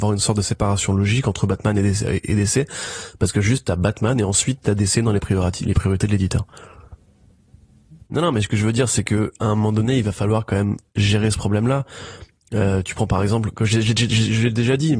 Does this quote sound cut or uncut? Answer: cut